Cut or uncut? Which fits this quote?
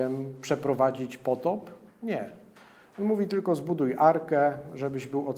uncut